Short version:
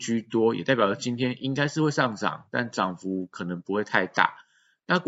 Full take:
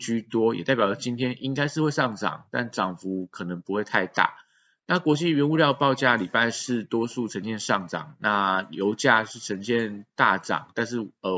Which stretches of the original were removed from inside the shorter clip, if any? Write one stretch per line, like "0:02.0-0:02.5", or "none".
none